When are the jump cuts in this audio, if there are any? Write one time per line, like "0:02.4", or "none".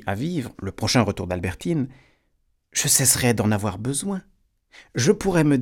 none

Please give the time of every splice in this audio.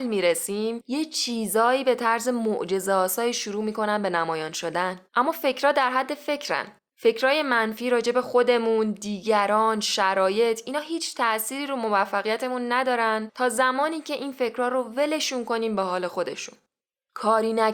0:05.1

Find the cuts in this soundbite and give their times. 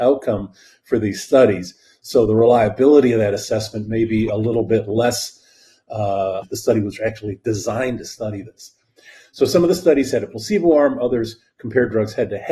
0:06.4

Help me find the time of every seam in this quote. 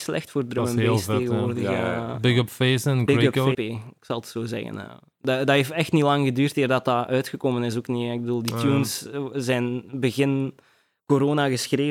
0:03.5

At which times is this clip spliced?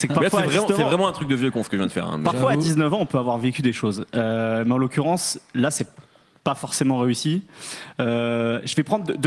none

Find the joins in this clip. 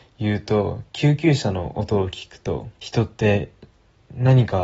0:02.8

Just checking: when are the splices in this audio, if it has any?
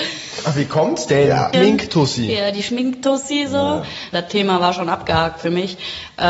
0:01.5
0:04.1

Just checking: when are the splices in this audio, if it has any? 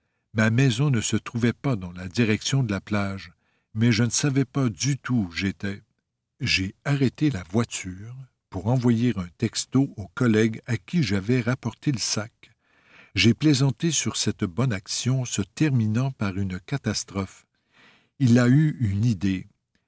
none

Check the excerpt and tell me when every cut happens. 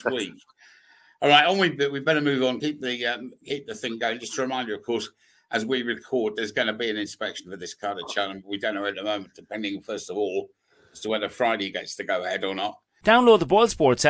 none

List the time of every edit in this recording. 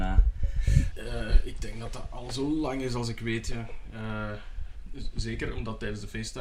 0:00.9

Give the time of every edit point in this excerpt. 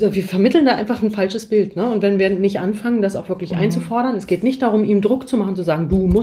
none

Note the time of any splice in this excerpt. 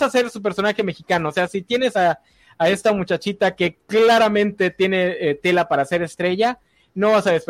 none

